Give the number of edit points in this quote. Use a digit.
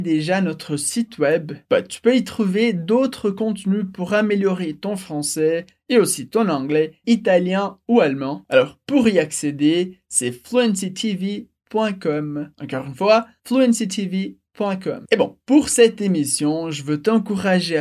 1